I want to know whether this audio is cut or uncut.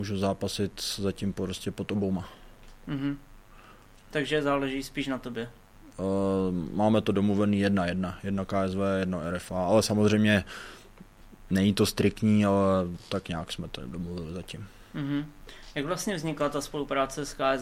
uncut